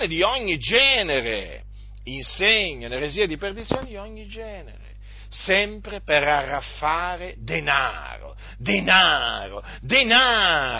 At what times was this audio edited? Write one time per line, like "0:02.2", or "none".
none